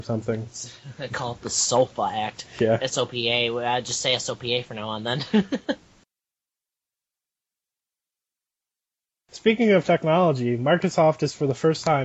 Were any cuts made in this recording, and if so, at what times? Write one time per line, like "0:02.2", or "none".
none